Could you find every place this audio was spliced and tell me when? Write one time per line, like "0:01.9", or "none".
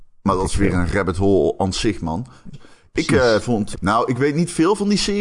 0:02.5
0:03.7